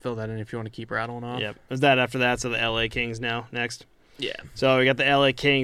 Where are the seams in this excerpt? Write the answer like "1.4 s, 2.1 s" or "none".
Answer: none